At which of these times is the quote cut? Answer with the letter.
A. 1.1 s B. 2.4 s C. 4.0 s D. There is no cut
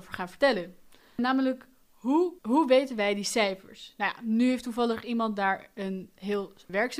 B